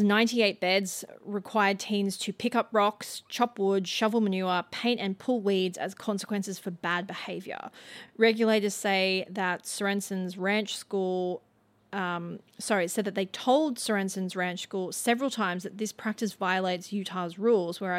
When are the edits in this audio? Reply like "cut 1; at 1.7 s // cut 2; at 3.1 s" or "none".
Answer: none